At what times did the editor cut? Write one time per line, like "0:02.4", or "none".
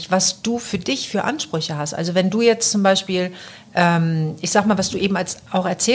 none